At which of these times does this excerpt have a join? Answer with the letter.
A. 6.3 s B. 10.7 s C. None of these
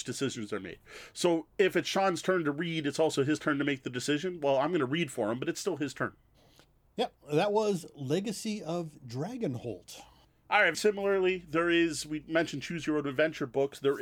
B